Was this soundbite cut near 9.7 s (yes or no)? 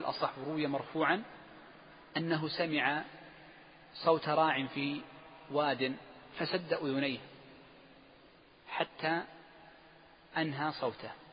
no